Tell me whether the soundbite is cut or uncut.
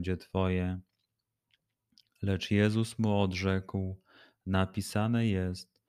uncut